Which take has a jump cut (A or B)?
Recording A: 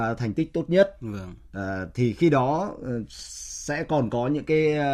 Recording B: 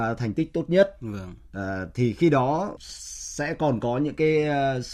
B